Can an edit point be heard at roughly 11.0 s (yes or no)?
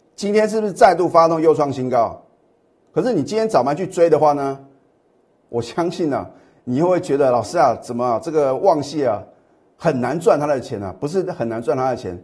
no